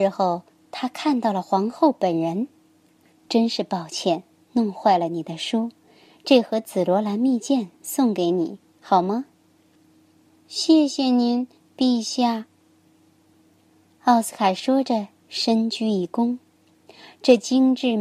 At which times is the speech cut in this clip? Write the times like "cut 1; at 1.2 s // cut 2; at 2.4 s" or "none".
cut 1; at 3.1 s